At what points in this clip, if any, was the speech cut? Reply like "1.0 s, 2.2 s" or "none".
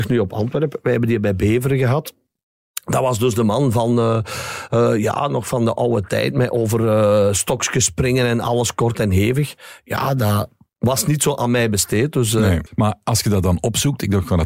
12.7 s

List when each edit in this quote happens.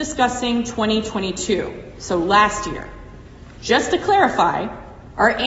none

